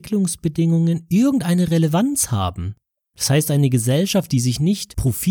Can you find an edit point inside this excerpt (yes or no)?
yes